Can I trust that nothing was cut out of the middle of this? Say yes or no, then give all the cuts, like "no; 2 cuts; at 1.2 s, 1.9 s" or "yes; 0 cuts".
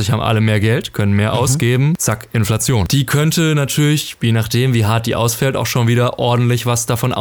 yes; 0 cuts